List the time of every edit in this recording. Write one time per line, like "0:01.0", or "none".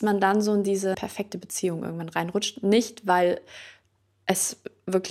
0:00.9